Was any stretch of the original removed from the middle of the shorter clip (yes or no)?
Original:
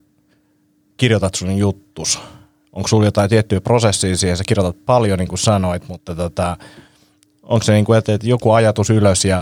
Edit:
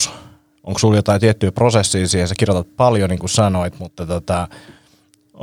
no